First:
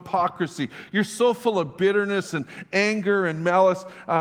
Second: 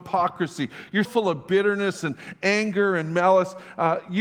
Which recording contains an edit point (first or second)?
second